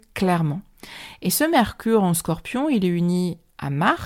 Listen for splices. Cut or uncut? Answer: uncut